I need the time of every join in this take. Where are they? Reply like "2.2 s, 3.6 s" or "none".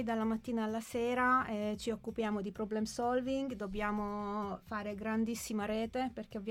none